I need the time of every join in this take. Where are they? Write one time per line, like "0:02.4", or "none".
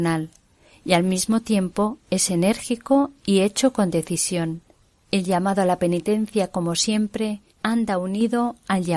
0:05.0
0:07.5